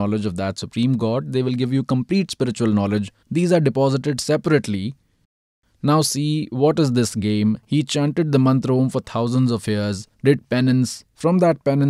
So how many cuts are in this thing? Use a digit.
2